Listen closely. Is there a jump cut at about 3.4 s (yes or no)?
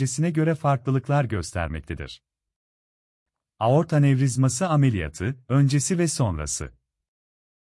no